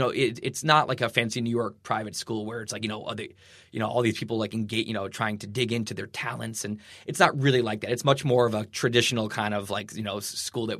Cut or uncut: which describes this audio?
uncut